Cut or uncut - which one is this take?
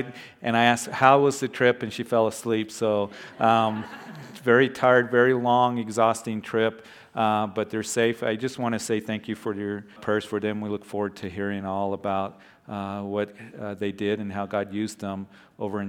cut